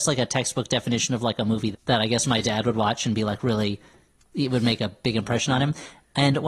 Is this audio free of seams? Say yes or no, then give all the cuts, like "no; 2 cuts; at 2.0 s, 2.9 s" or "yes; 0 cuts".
no; 1 cut; at 1.7 s